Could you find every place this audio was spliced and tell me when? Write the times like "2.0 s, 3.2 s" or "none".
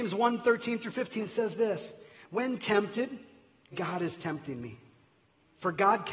3.7 s